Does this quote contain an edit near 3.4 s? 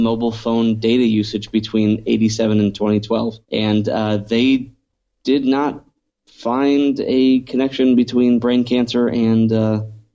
yes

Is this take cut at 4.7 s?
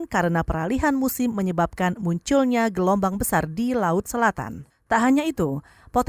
yes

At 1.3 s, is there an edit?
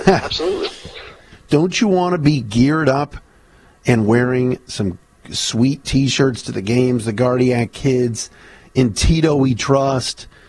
yes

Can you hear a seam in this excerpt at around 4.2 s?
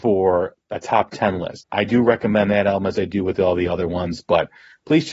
no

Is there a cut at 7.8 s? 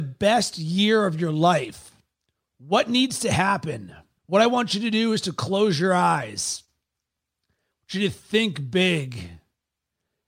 no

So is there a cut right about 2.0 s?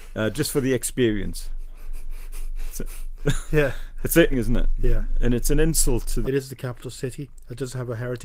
no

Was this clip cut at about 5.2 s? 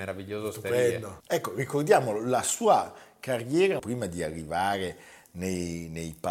no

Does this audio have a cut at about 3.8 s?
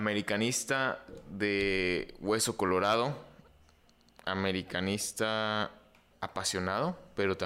no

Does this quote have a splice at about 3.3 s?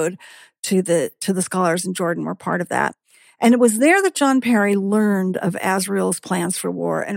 no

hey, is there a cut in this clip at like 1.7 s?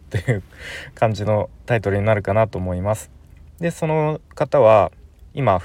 no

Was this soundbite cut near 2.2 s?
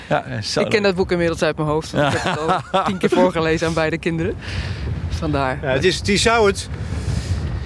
no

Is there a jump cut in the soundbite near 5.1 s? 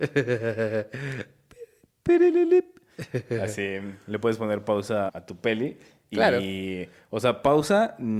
yes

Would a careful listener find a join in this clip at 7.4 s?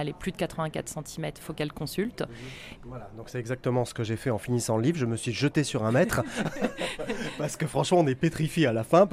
no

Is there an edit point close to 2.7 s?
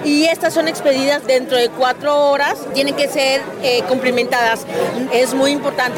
no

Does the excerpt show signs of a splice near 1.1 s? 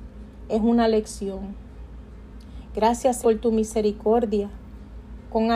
no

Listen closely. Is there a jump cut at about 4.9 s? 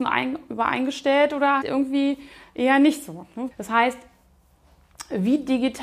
no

